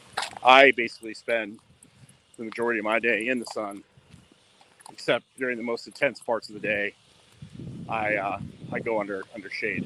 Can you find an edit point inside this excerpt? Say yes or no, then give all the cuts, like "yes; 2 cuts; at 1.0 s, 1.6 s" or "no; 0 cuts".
yes; 1 cut; at 4.8 s